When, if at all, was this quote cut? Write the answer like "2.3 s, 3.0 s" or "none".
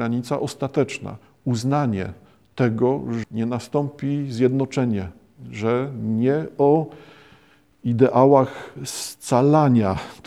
3.2 s